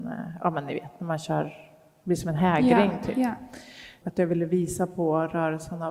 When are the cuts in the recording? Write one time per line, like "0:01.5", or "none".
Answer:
0:04.0